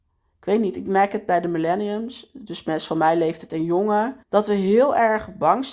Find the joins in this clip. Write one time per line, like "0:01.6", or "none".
0:04.2

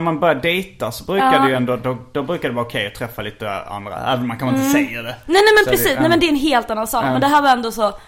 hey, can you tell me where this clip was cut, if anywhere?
none

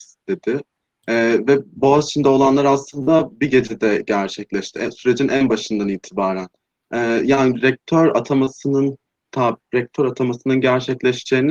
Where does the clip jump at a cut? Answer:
none

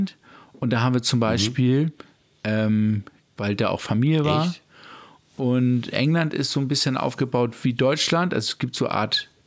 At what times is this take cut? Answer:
0:03.2

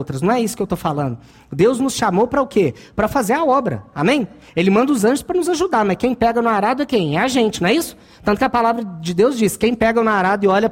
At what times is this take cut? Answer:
none

